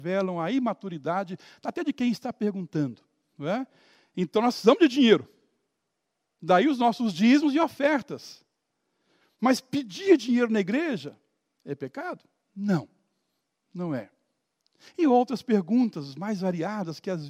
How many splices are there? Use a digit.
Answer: 1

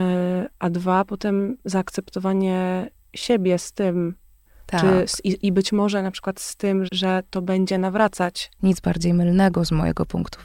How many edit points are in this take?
2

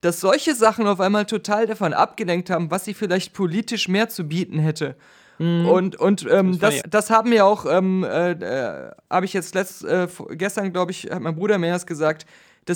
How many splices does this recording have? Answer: 1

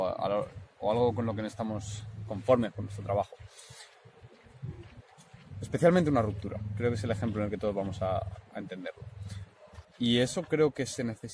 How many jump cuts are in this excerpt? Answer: 1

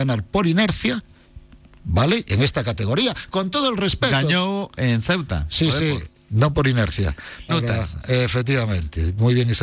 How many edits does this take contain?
2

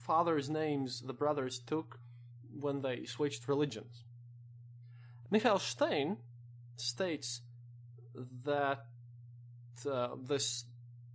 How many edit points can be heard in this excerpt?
1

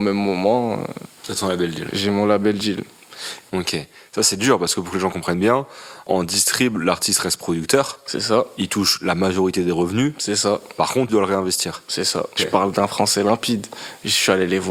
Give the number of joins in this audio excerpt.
3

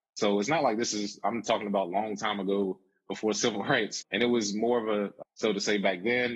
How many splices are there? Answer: 2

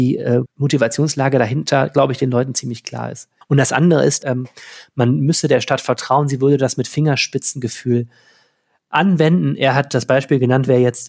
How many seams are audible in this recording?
1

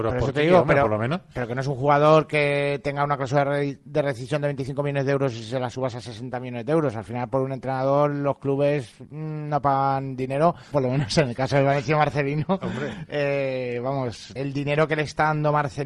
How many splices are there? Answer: 2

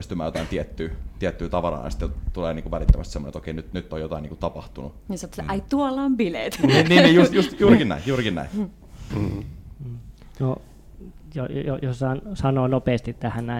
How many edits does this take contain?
1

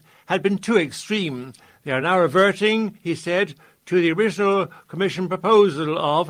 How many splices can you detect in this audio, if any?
0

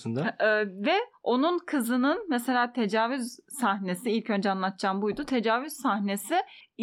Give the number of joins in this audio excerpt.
0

